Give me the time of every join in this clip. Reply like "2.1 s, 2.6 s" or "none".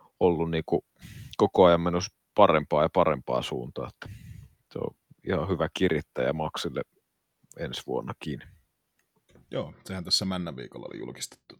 none

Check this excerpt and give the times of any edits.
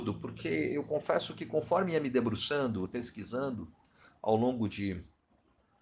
2.9 s

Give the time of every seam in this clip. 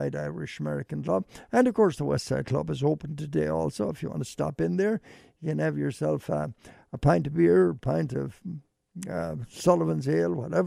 none

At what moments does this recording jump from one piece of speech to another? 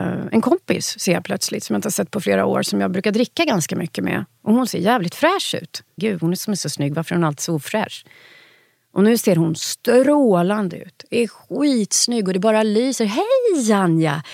6.0 s

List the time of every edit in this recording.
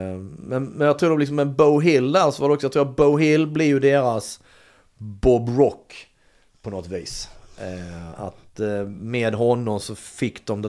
none

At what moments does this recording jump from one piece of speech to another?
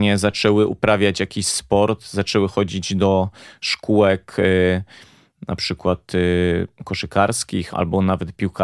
7.7 s

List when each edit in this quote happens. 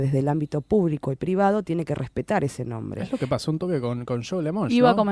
none

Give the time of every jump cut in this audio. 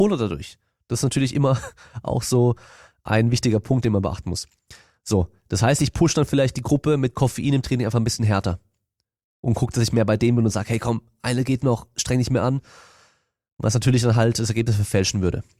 none

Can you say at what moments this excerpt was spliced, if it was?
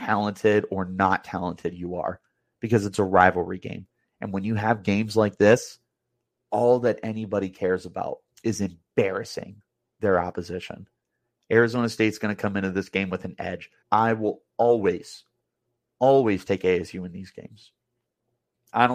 13.8 s

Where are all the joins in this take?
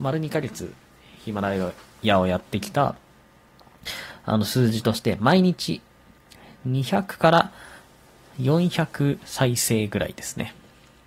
none

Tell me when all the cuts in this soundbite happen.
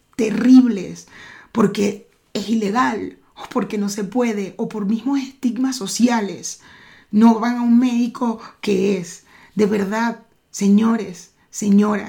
none

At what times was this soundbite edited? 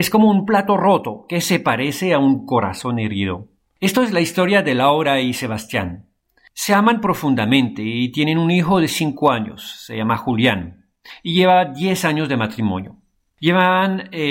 none

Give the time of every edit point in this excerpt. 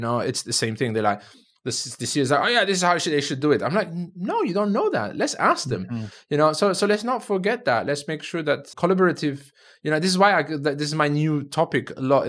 6.1 s, 8.7 s

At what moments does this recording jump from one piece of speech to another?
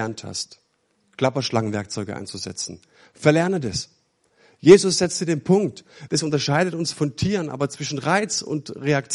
6.1 s

